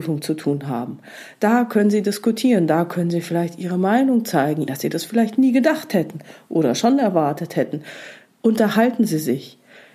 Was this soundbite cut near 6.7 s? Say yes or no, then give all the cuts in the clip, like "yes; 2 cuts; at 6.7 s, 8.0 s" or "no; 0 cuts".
no; 1 cut; at 4.7 s